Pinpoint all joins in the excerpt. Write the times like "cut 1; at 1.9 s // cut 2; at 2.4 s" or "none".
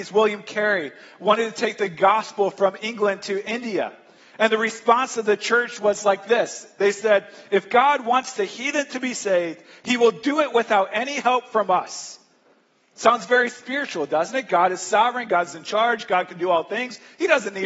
none